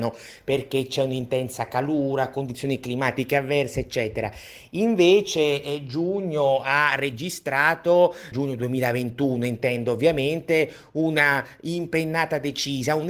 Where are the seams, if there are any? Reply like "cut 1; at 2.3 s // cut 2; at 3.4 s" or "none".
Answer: cut 1; at 8.3 s